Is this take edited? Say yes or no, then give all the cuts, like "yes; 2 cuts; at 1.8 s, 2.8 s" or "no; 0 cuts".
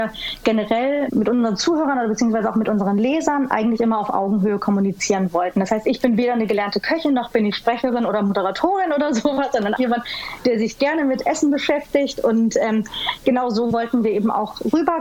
yes; 1 cut; at 9.8 s